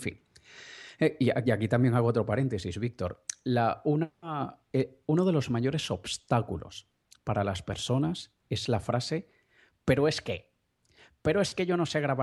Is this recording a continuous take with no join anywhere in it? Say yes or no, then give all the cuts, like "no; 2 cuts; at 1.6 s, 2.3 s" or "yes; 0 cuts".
yes; 0 cuts